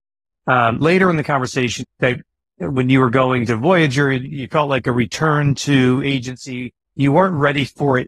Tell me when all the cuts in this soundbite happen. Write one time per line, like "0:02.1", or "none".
0:01.8